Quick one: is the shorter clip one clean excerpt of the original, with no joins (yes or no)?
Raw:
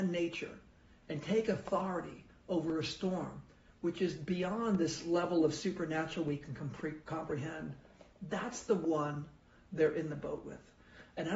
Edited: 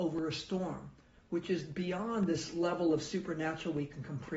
yes